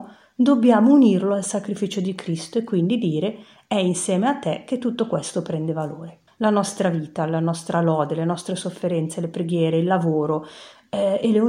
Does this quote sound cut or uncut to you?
cut